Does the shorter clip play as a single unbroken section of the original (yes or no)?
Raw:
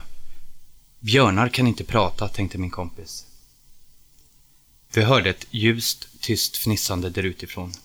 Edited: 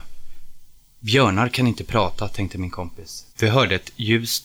no